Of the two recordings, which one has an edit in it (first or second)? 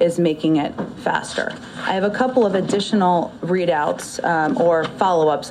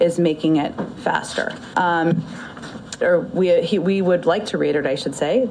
second